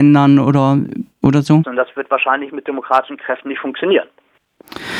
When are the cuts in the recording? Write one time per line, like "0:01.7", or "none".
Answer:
0:01.6